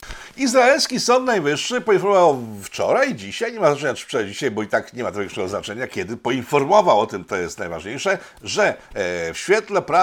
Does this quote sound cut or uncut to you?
uncut